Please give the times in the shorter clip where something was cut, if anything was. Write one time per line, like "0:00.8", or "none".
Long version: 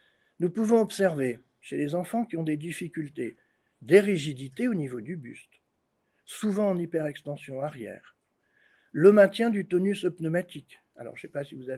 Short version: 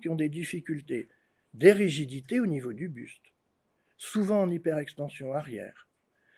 none